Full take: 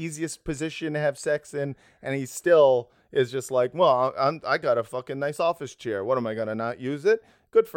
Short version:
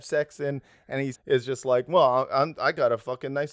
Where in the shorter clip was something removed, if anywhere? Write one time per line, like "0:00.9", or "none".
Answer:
0:01.1

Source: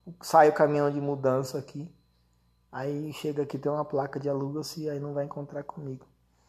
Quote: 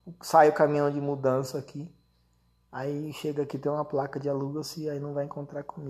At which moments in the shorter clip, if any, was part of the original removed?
none

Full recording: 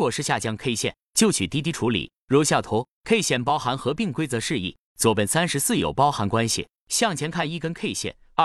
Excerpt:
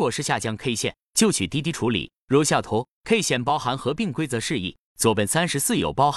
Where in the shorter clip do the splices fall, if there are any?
none

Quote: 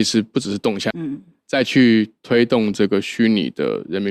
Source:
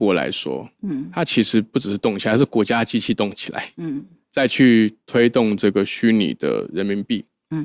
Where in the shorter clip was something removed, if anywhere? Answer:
0:00.9

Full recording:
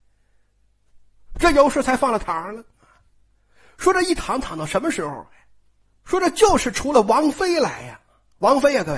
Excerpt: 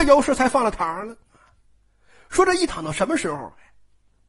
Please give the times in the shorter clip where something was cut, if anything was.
0:02.7

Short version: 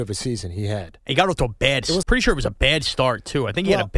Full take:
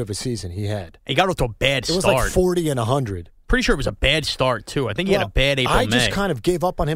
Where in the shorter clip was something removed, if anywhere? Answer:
0:02.0

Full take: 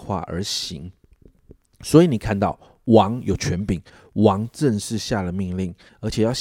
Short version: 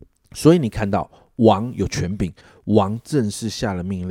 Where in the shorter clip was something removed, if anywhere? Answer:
none

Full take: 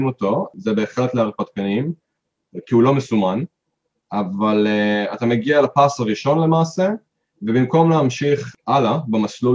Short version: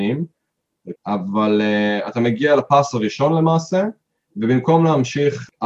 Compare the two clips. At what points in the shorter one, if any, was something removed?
0:00.9

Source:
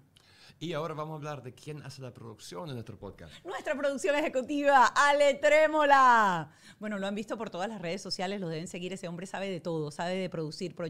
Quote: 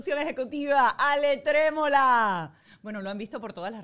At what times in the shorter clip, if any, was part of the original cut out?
none

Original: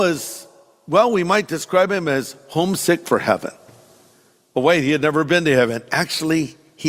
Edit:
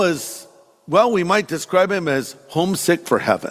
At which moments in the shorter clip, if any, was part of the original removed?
none

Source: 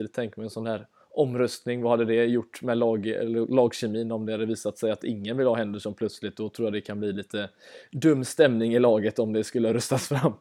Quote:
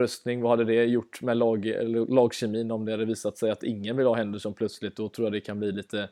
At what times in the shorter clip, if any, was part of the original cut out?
none

